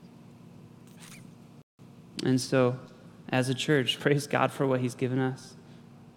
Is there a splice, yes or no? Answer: yes